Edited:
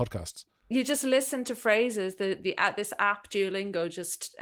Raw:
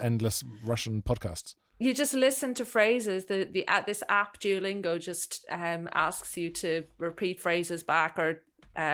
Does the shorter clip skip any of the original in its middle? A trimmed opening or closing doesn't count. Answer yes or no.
no